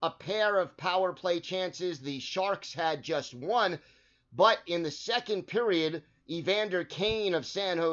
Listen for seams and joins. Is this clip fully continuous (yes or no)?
yes